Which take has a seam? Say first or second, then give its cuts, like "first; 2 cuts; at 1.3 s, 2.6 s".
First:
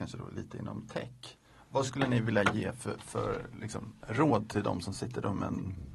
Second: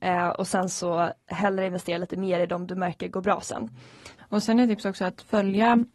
second; 1 cut; at 4.2 s